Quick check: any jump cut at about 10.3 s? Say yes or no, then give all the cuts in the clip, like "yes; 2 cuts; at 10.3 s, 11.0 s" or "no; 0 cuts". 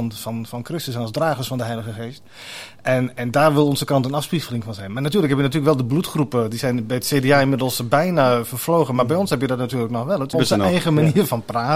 yes; 1 cut; at 10.3 s